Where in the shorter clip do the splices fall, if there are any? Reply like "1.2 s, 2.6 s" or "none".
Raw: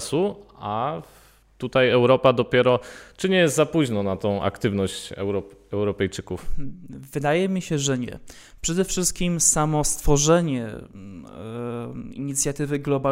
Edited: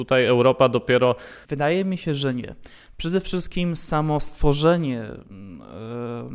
1.4 s